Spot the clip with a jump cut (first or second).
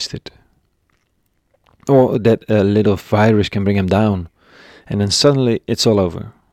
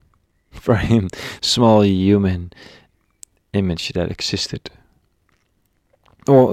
second